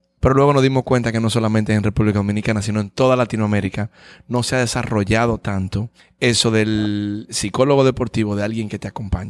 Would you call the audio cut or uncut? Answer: uncut